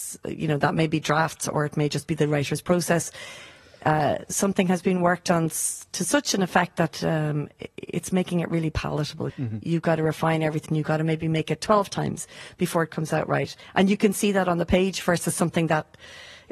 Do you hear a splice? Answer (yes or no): yes